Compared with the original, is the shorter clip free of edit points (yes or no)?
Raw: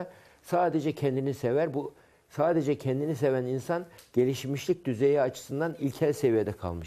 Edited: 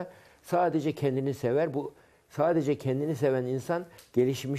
yes